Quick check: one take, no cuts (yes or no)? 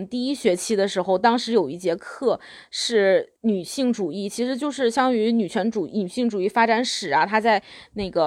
no